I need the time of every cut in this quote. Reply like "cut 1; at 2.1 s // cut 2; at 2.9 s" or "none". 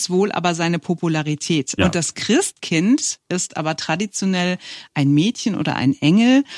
cut 1; at 1.8 s